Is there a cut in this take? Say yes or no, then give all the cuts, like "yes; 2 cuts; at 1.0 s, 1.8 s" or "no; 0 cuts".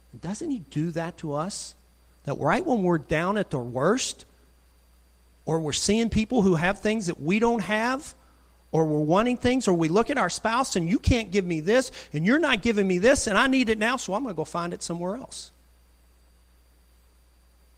no; 0 cuts